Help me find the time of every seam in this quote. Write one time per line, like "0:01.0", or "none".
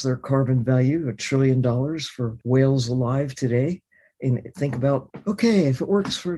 none